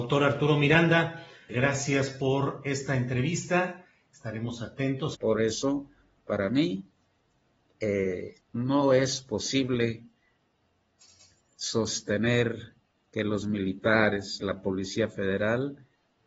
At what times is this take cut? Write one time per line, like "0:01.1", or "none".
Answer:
0:01.5
0:05.1
0:08.4